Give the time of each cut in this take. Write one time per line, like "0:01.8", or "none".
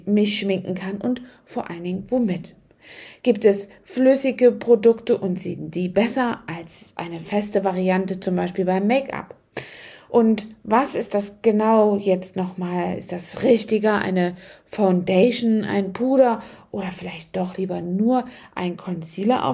none